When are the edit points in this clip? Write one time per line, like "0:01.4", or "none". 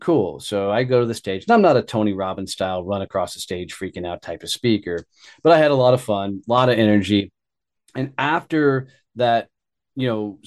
none